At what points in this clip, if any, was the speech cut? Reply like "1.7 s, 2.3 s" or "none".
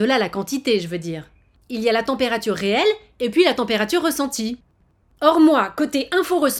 1.6 s